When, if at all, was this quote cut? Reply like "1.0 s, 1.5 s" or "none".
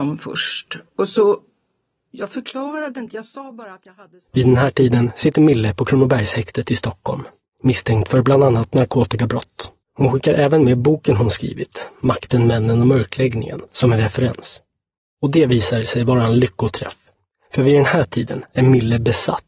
9.8 s